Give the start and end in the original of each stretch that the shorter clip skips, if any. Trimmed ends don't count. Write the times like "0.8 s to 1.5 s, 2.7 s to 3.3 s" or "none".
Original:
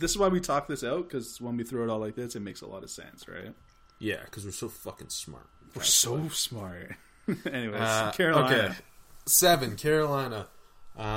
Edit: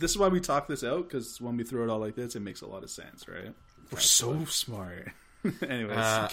3.7 s to 5.6 s